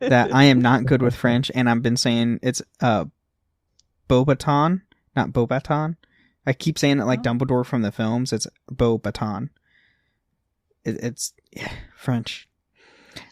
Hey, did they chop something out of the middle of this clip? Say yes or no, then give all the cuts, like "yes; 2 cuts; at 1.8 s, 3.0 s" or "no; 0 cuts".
no; 0 cuts